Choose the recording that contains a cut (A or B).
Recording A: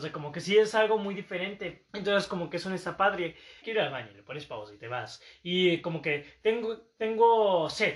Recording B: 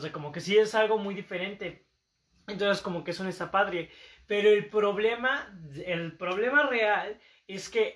A